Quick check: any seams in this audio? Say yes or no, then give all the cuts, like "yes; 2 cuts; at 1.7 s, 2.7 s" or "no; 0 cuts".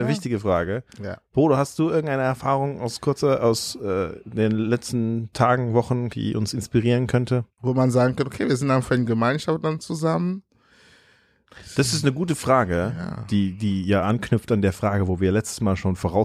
yes; 2 cuts; at 6.1 s, 7.6 s